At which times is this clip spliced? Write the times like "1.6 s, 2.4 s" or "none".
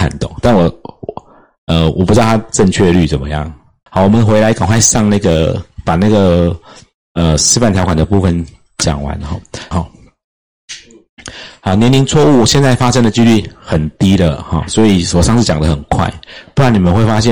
3.9 s, 9.7 s